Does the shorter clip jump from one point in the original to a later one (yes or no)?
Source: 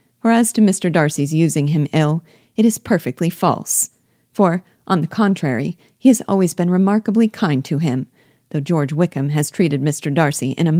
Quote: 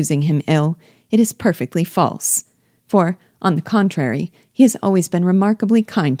no